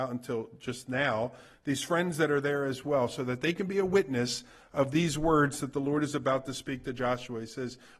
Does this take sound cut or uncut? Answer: uncut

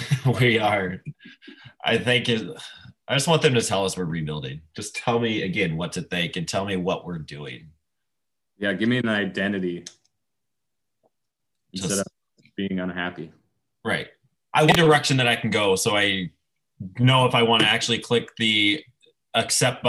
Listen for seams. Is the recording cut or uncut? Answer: uncut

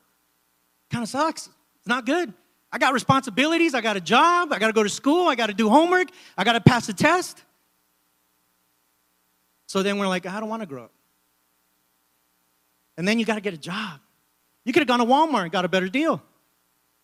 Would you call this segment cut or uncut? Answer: cut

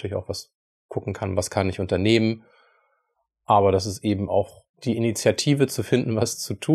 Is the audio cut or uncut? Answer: cut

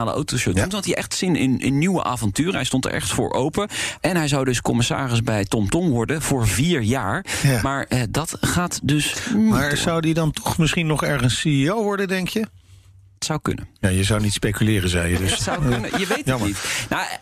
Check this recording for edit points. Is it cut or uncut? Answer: cut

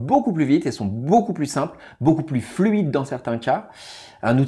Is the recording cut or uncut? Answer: uncut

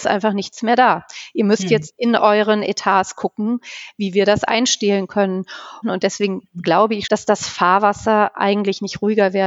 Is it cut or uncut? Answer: cut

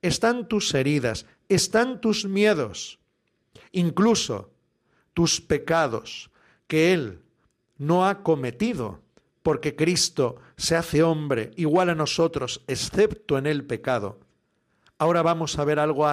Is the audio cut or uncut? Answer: uncut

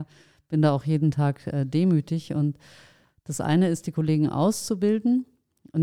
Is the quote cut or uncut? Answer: uncut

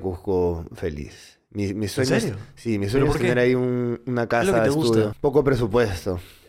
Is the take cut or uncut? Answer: cut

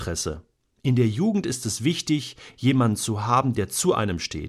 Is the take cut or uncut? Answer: uncut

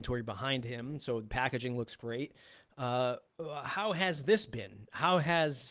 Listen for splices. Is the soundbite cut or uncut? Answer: uncut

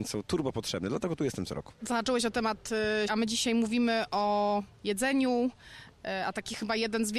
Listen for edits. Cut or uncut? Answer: cut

